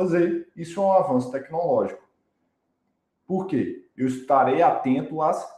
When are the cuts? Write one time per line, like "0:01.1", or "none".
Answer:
none